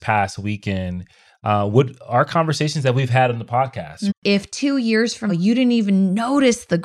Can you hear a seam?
yes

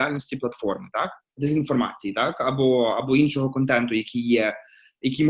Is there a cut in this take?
yes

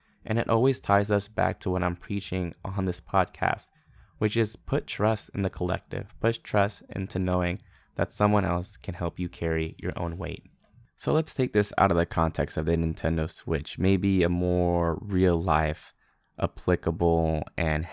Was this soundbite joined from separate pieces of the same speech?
no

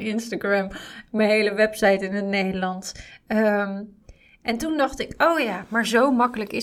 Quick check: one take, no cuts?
yes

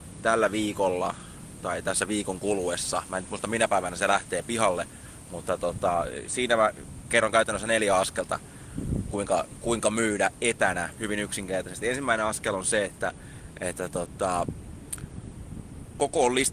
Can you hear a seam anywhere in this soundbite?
no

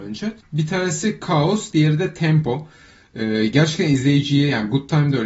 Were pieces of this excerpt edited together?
yes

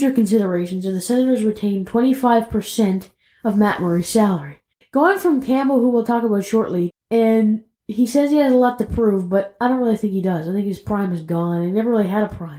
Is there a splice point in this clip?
yes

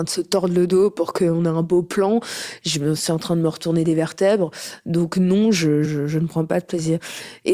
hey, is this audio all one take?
no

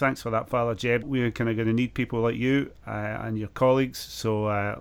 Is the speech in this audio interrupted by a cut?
yes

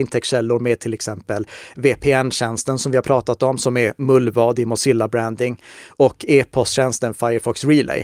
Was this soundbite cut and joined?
no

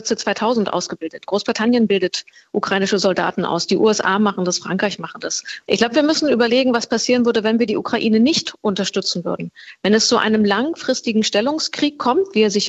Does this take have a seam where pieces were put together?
yes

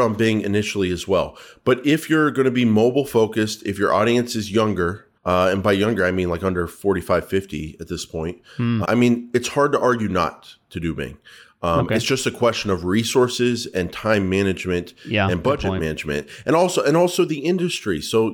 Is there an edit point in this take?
yes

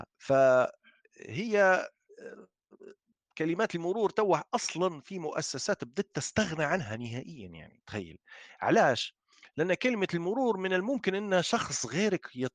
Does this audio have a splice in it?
no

